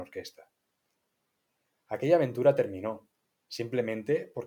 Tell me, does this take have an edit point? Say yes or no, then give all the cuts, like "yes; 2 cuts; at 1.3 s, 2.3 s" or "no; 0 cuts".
no; 0 cuts